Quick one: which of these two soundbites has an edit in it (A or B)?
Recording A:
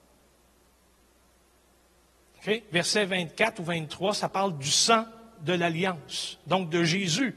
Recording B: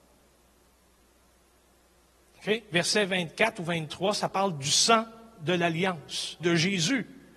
B